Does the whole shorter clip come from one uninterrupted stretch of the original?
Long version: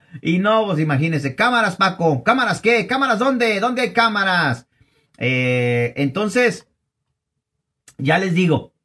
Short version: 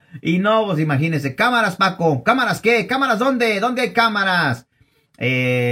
yes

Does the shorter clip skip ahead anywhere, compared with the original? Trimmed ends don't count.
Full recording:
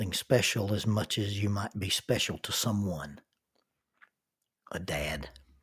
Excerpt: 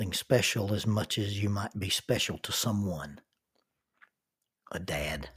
no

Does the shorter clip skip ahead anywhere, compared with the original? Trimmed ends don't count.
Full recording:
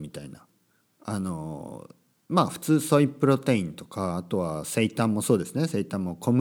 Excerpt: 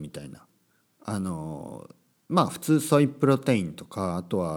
no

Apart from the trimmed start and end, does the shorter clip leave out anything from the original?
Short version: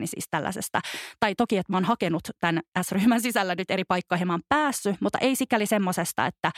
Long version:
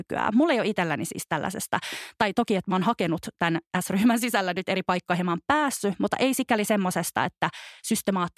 no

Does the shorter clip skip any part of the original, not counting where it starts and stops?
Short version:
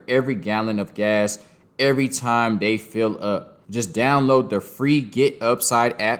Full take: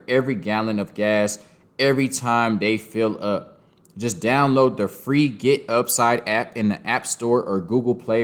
yes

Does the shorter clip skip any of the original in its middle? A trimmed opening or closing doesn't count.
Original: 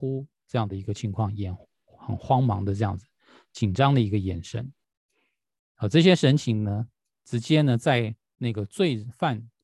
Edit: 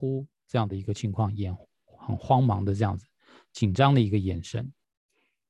no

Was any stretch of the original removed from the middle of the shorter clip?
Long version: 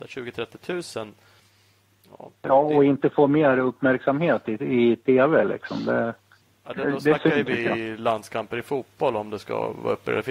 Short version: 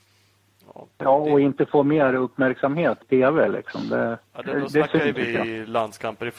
yes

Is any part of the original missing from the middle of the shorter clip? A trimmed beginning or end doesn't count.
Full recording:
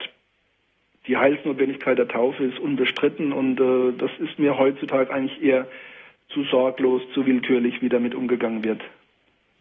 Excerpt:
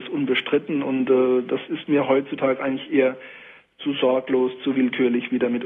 no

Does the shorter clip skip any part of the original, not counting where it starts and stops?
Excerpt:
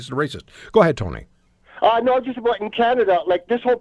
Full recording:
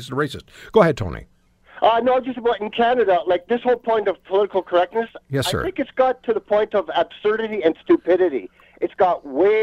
no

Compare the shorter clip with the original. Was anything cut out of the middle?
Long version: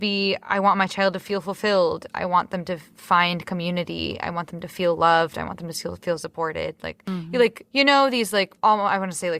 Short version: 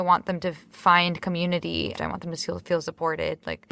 yes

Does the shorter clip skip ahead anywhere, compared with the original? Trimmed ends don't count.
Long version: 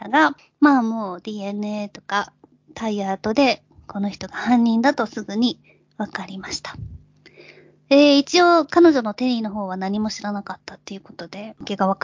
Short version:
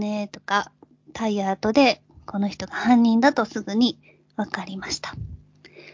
no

